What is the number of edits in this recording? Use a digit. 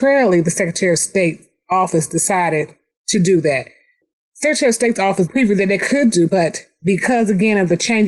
2